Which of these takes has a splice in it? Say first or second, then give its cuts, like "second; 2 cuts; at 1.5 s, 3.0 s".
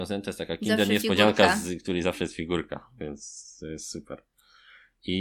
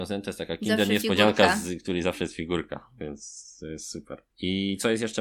second; 1 cut; at 4.3 s